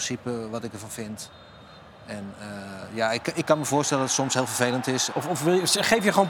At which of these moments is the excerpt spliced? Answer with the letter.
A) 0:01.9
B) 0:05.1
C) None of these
B